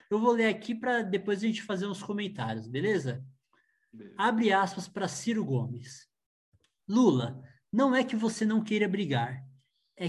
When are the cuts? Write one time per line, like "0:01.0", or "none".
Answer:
none